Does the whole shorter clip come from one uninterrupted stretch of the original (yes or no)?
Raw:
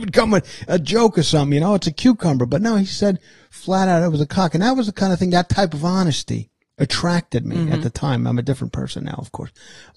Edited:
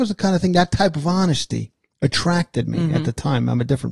yes